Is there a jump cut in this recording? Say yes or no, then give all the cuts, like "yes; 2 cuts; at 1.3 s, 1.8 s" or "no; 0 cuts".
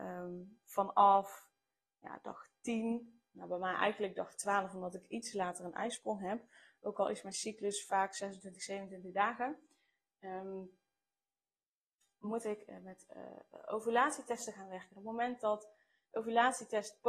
no; 0 cuts